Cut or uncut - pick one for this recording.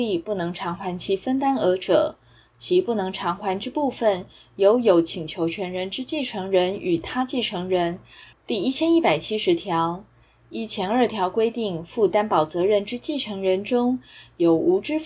cut